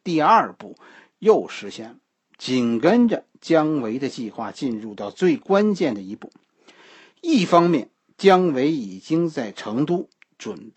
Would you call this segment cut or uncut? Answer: uncut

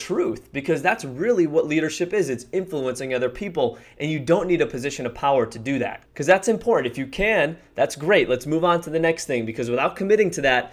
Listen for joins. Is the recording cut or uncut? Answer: cut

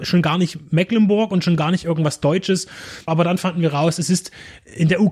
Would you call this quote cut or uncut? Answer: cut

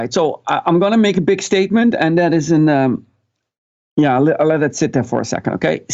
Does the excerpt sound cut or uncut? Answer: uncut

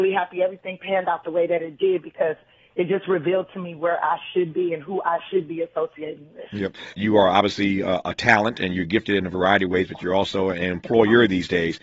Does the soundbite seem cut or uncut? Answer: cut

